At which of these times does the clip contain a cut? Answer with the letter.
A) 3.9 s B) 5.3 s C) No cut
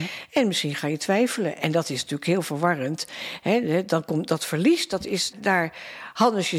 B